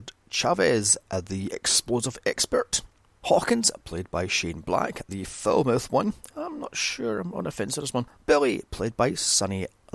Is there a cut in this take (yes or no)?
yes